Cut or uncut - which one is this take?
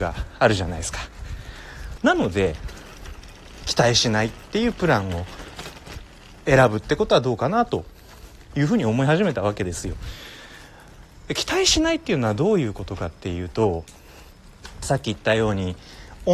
cut